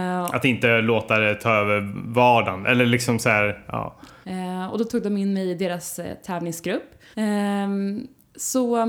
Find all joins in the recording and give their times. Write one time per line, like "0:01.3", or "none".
0:04.2
0:07.1